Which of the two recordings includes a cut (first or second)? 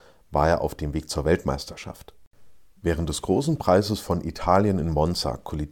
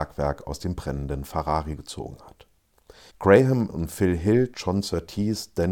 second